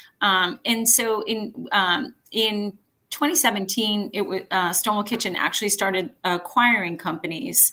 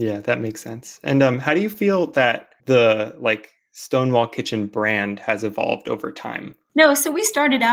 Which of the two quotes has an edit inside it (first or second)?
second